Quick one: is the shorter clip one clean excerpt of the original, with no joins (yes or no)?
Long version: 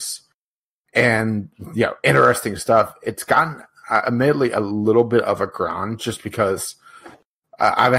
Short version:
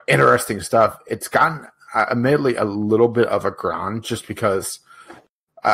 yes